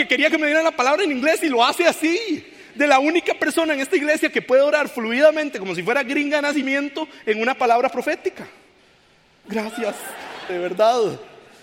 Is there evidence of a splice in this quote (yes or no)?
yes